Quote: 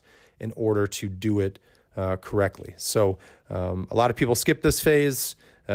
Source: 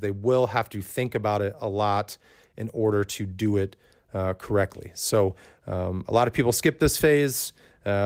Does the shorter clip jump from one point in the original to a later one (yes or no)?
no